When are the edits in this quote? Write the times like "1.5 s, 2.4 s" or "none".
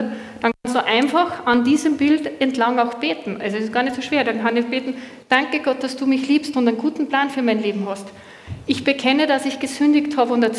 none